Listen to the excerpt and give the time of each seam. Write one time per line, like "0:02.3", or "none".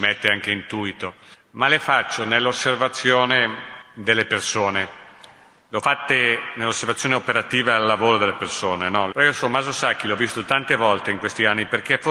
0:09.1